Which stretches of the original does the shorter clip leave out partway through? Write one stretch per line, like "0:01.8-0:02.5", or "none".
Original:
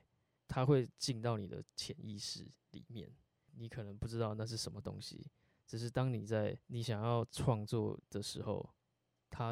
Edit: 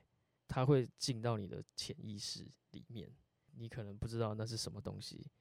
none